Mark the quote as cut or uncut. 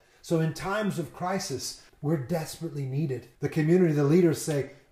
cut